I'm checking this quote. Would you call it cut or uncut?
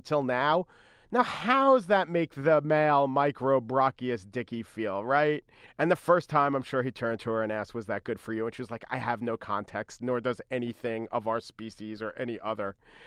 cut